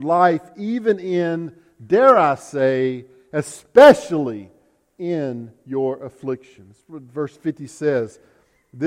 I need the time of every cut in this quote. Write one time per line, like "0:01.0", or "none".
none